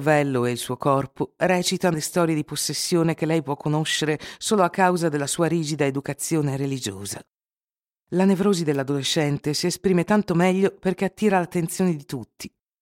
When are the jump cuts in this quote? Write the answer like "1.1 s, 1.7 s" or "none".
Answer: 1.9 s